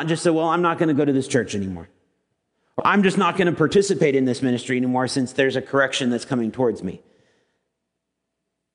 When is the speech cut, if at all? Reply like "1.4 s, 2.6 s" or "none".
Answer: 2.8 s